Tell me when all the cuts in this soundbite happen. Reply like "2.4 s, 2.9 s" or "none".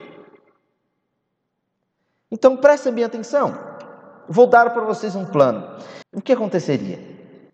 6.0 s